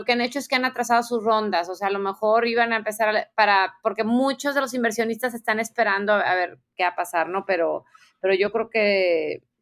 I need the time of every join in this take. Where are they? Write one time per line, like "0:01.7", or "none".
none